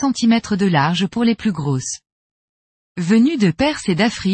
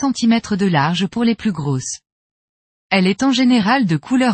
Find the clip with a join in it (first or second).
first